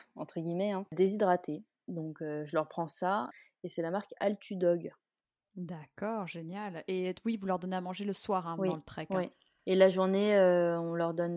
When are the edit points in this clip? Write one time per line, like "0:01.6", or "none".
none